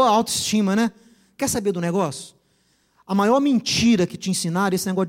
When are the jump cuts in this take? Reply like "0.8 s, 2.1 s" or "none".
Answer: none